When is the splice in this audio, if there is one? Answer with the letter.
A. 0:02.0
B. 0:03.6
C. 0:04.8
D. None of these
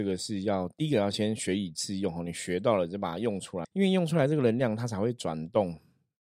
B